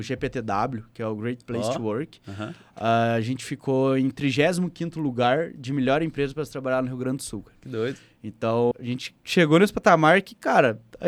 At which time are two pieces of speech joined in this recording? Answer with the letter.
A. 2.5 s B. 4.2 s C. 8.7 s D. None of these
C